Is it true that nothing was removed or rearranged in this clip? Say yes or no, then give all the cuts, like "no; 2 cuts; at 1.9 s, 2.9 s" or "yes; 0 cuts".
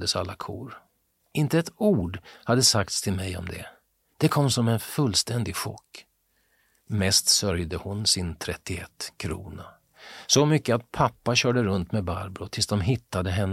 yes; 0 cuts